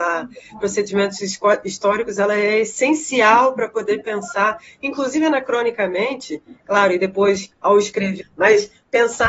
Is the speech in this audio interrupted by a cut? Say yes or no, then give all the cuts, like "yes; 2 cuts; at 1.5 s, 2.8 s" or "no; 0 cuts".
yes; 1 cut; at 8.2 s